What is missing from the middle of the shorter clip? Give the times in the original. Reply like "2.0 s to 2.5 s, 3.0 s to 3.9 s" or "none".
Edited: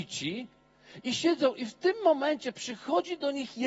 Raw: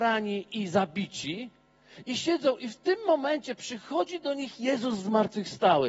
none